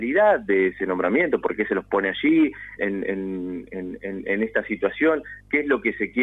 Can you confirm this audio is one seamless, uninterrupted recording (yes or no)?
no